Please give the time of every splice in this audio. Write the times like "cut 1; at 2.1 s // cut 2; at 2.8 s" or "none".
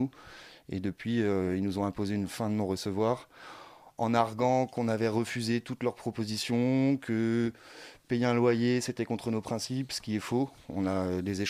none